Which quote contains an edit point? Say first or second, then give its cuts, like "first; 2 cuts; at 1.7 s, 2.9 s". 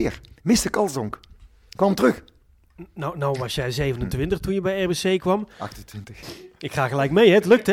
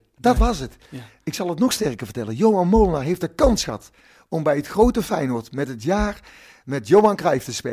first; 1 cut; at 6.2 s